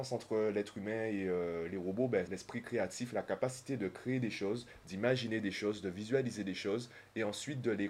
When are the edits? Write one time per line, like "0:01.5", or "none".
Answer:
0:02.3

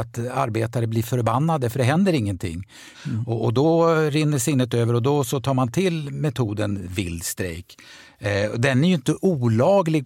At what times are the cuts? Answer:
0:02.9

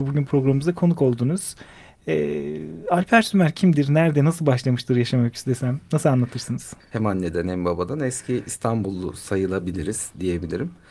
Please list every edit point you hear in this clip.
0:06.8

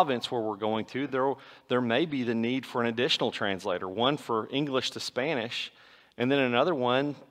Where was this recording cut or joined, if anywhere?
none

